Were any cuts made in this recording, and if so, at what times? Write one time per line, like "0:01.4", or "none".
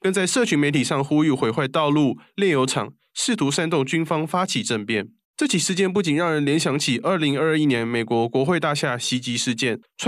none